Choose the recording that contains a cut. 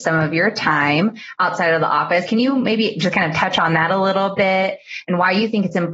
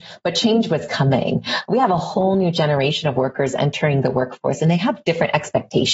first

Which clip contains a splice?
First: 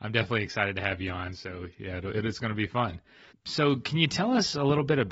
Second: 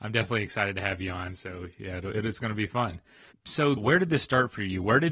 second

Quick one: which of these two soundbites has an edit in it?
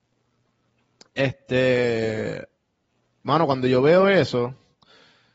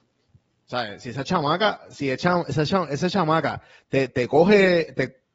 second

